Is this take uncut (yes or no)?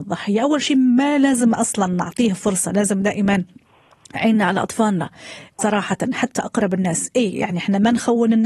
no